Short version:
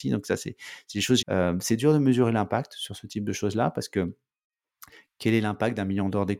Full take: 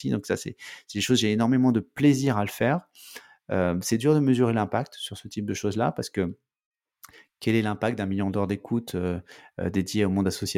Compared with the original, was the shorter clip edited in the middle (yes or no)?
yes